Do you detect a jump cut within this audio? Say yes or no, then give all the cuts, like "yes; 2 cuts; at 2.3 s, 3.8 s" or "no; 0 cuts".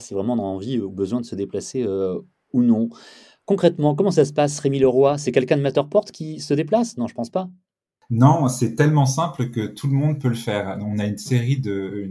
no; 0 cuts